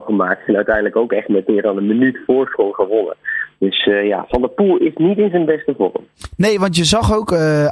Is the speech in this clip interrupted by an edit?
no; 0 cuts

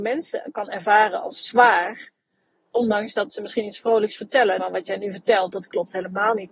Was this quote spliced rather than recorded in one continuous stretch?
yes; 1 cut; at 4.6 s

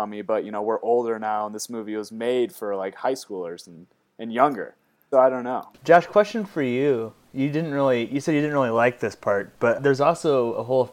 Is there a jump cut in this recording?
yes; 2 cuts; at 5.1 s, 9.8 s

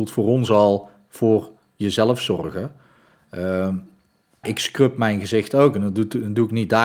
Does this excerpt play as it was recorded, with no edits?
no; 1 cut; at 4.4 s

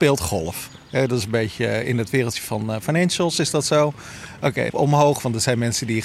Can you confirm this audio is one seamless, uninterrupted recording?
no; 1 cut; at 4.7 s

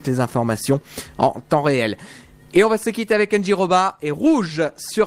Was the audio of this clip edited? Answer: no; 0 cuts

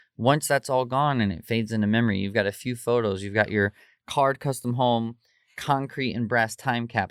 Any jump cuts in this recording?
no; 0 cuts

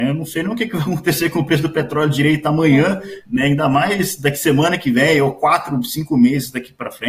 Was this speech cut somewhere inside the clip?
no; 0 cuts

